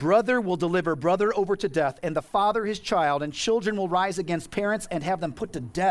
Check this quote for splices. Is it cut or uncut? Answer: uncut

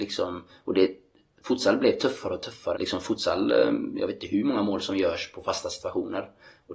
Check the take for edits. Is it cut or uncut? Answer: cut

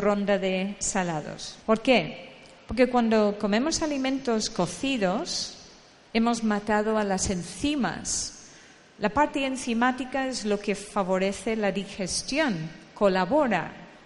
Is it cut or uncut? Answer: cut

